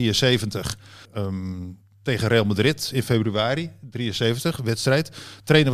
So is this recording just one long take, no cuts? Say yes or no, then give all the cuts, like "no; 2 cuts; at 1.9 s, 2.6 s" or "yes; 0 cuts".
no; 1 cut; at 1.0 s